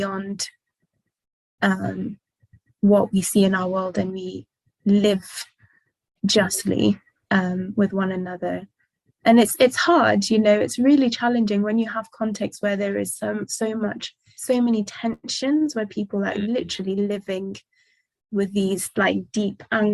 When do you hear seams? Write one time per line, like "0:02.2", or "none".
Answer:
0:14.4